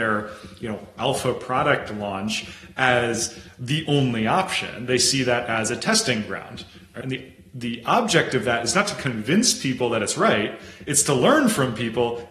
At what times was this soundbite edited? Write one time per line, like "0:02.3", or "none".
0:07.0